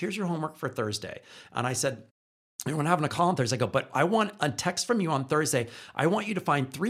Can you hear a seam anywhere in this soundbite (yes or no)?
no